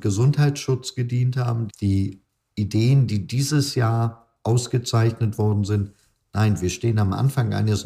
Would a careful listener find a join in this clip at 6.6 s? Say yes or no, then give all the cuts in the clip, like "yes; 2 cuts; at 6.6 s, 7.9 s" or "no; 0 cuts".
no; 1 cut; at 1.7 s